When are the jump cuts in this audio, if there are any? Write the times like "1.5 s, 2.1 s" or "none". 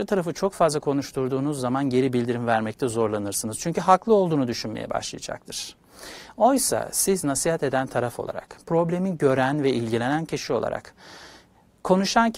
none